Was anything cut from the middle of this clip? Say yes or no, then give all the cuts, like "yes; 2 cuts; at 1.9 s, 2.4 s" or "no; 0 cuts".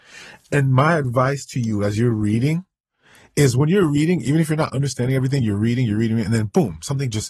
no; 0 cuts